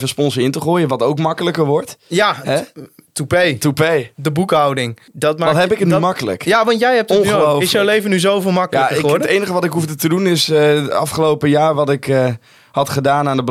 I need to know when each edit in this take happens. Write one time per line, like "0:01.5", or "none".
0:05.1